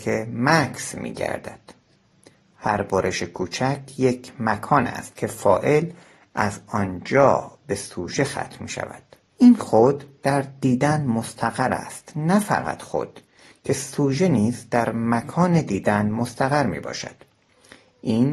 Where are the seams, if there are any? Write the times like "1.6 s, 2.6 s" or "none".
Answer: 9.3 s